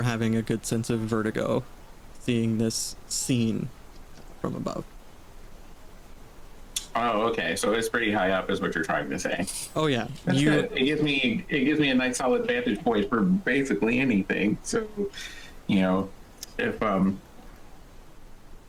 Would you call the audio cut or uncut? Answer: uncut